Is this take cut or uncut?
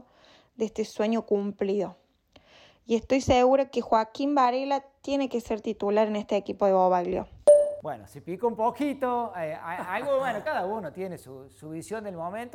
uncut